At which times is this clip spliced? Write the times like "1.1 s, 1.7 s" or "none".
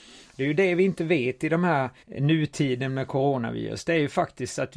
2.0 s